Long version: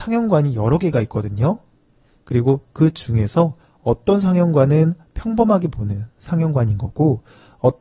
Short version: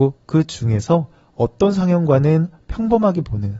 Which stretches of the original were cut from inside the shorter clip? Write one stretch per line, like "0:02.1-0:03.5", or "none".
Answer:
none